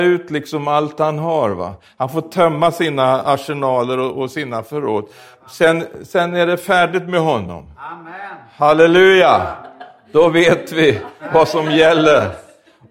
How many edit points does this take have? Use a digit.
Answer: 0